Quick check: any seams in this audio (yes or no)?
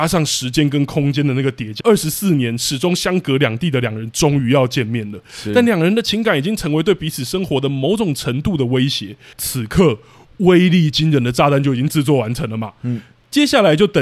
yes